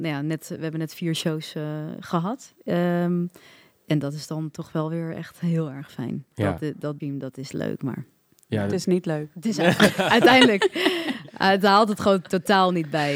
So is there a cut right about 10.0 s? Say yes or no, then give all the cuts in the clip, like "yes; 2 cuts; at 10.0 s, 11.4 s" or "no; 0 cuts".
no; 1 cut; at 7.0 s